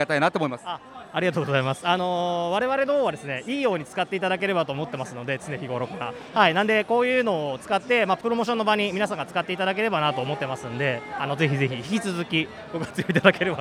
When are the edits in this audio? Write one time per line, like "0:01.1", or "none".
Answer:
none